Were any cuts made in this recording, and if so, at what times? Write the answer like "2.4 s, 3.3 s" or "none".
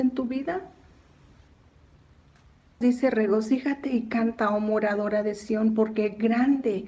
2.8 s